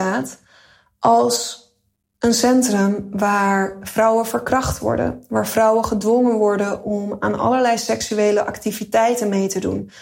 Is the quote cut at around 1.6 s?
no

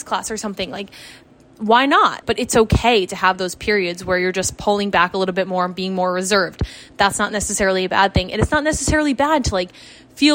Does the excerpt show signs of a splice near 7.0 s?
no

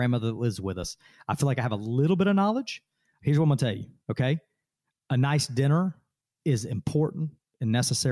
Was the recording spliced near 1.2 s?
no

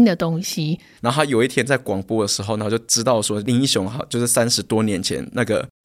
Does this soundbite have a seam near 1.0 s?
yes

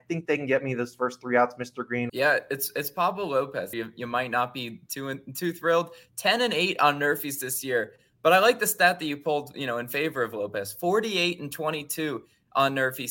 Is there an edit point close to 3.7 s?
yes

